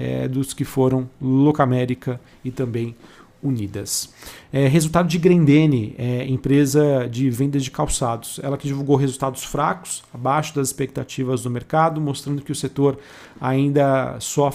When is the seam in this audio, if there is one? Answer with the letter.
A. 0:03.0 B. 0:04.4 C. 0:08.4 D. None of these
D